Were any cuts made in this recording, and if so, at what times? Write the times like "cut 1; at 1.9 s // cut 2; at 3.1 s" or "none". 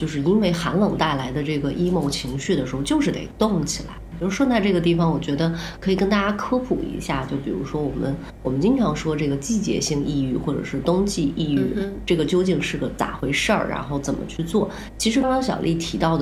cut 1; at 15.2 s